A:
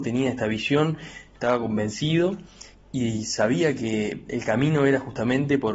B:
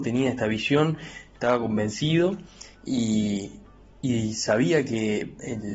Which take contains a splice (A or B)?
A